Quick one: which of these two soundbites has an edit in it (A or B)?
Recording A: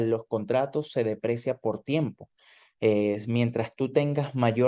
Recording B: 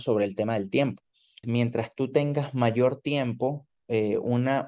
B